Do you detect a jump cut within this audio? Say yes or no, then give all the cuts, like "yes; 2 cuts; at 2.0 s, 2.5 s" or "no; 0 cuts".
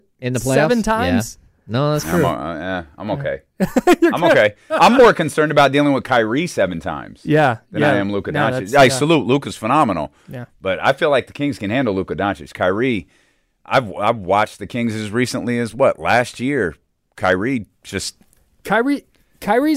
no; 0 cuts